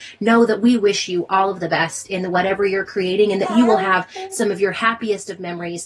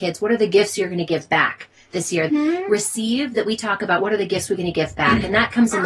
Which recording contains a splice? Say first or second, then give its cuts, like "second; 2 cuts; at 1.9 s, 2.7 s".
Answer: second; 1 cut; at 2.3 s